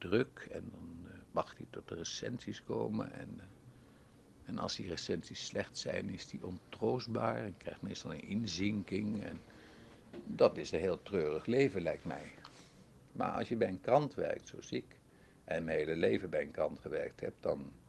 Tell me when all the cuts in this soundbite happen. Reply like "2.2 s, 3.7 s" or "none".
none